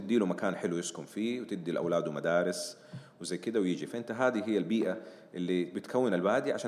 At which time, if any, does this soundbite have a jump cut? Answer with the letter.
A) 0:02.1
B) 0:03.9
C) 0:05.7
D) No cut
D